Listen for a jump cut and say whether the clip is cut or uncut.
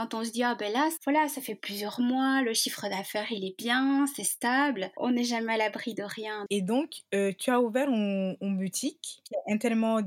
cut